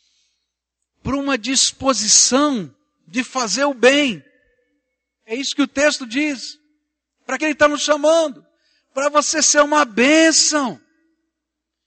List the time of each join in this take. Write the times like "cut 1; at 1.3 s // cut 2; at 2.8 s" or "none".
cut 1; at 7.4 s

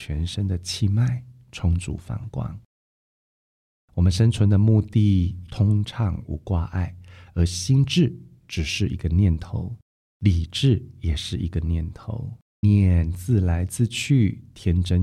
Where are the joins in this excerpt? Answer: cut 1; at 5.5 s // cut 2; at 12.6 s

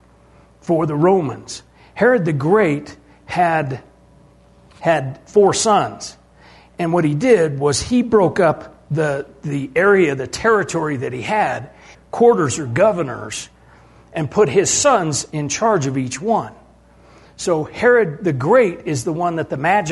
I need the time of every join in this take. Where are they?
cut 1; at 11.9 s

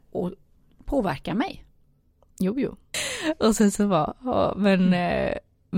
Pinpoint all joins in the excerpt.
cut 1; at 2.9 s

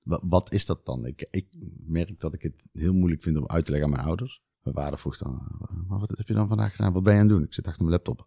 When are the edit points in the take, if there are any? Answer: cut 1; at 4.5 s // cut 2; at 6.2 s

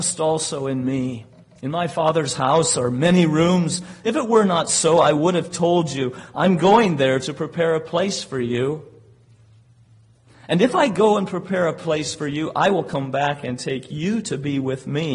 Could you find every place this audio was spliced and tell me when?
none

